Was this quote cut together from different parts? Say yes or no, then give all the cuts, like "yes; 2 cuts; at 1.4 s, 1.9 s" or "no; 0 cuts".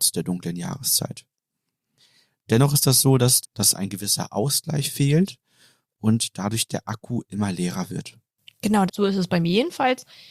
yes; 2 cuts; at 3.4 s, 8.9 s